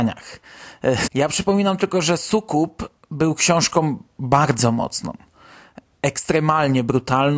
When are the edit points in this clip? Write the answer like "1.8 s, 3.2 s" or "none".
1.1 s

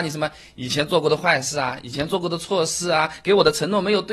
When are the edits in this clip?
none

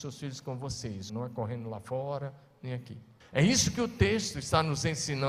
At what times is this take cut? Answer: 1.1 s, 3.2 s

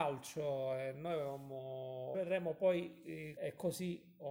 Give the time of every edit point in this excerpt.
2.1 s, 3.4 s

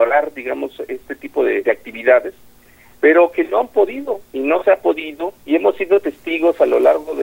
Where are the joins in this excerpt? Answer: 1.6 s, 5.4 s

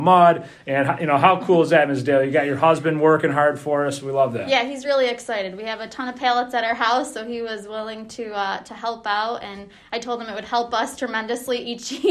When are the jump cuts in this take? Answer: none

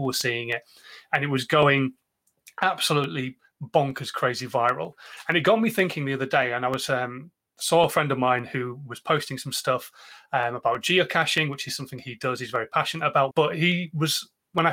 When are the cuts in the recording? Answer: 13.3 s

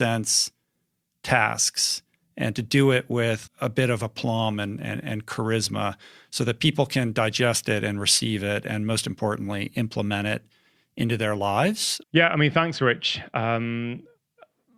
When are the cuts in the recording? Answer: 3.5 s, 12.0 s

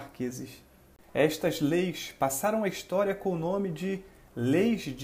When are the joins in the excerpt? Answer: none

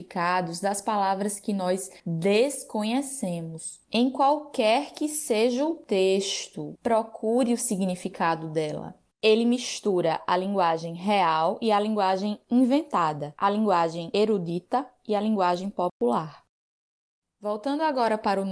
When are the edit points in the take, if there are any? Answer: 6.8 s, 9.1 s, 17.2 s

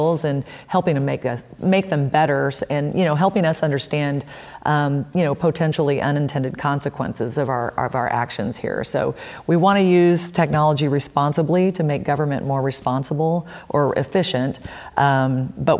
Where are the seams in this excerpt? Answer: none

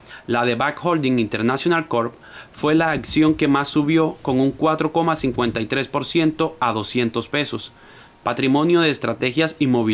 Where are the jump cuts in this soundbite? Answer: none

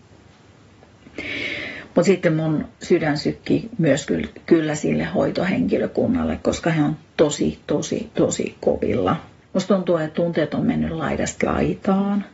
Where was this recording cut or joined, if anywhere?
2.7 s, 9.4 s

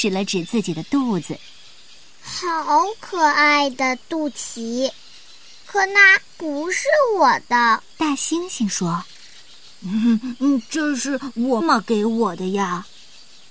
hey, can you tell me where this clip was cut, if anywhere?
7.9 s, 11.6 s

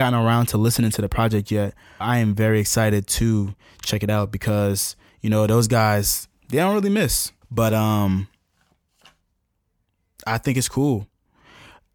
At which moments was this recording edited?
2.0 s, 7.4 s

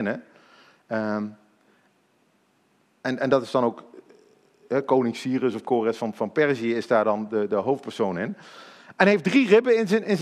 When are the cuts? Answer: none

